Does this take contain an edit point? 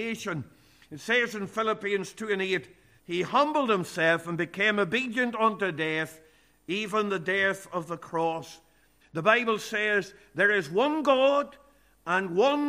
yes; 2 cuts; at 3.0 s, 9.0 s

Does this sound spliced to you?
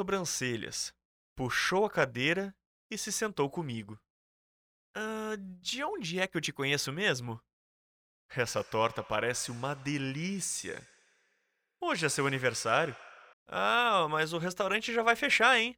yes; 2 cuts; at 8.2 s, 13.3 s

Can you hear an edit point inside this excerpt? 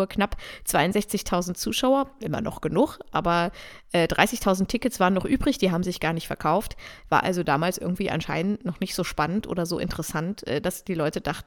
no; 0 cuts

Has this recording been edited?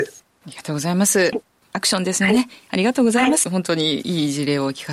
yes; 2 cuts; at 1.3 s, 3.4 s

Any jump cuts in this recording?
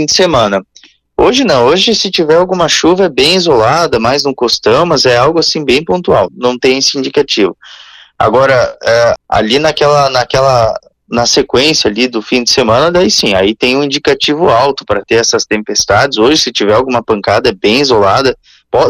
yes; 2 cuts; at 6.3 s, 9.2 s

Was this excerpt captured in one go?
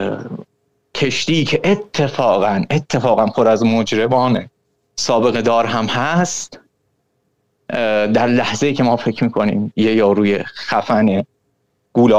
yes; 0 cuts

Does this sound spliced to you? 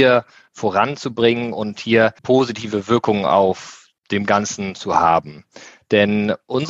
yes; 2 cuts; at 2.2 s, 4.0 s

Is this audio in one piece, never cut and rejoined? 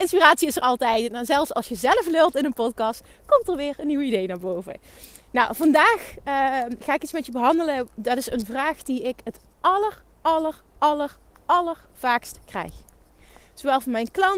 yes; 0 cuts

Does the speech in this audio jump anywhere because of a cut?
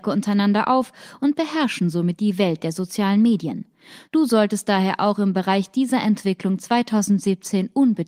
yes; 1 cut; at 4.1 s

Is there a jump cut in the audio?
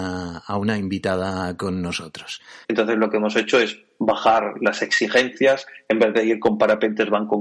yes; 1 cut; at 2.6 s

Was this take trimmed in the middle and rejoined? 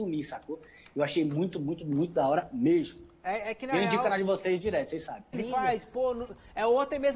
yes; 1 cut; at 5.3 s

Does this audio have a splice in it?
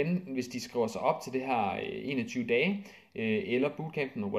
no; 0 cuts

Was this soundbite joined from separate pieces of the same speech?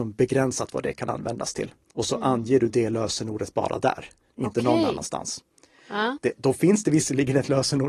yes; 2 cuts; at 1.9 s, 6.2 s

